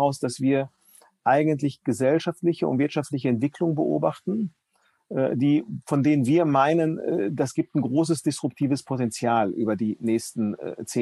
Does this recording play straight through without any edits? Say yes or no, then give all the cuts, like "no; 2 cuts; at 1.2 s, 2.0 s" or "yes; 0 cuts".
yes; 0 cuts